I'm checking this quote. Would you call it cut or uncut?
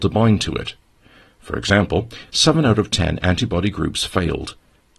cut